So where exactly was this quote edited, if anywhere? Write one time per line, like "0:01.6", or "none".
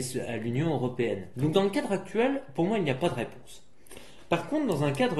0:01.3

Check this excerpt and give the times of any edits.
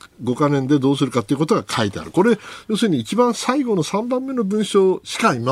none

